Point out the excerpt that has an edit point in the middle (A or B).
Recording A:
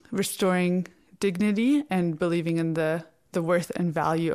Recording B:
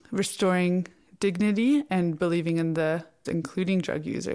B